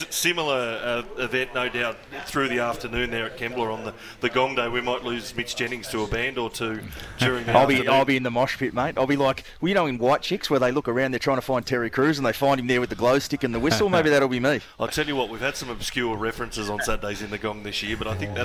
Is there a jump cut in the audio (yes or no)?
no